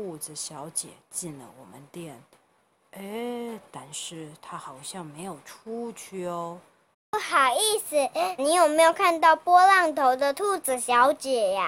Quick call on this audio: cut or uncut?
cut